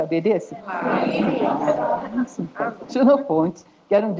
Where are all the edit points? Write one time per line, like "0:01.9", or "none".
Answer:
0:02.9

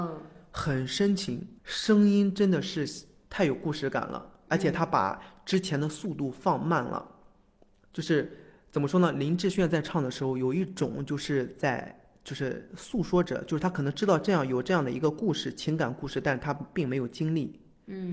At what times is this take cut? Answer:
0:01.6

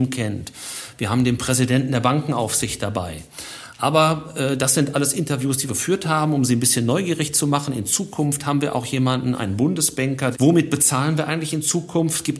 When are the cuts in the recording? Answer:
0:05.7
0:10.3

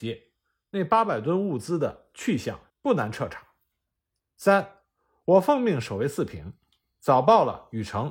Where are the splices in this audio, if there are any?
0:02.7

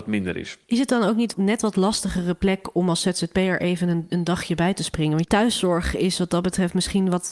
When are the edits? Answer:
none

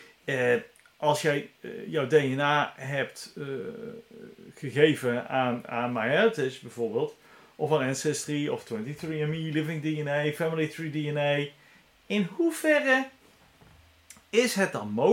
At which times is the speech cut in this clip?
none

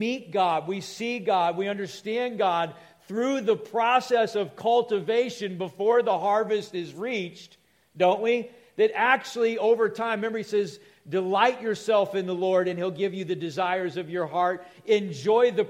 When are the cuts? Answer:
none

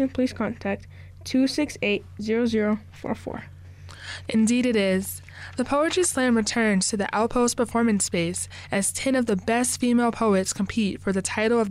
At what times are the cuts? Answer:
0:04.3

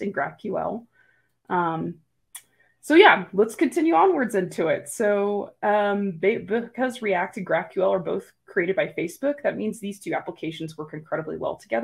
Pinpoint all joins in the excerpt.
none

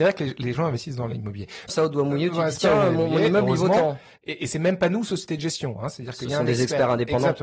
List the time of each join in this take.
0:01.7

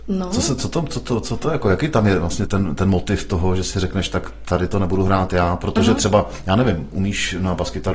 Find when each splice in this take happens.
0:02.5

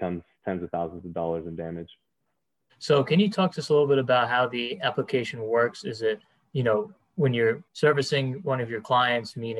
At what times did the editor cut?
0:02.7
0:07.7

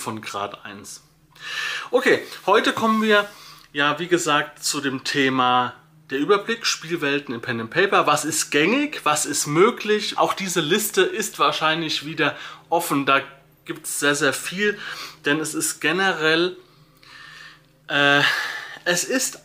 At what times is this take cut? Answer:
0:10.2

